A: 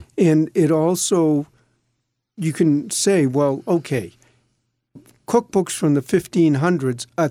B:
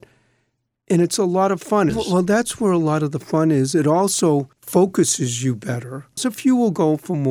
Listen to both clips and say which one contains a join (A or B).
B